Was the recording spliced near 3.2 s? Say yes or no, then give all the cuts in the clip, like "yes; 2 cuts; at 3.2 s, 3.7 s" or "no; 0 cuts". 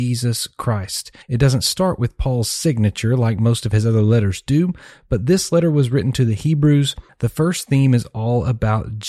no; 2 cuts; at 1.2 s, 7.1 s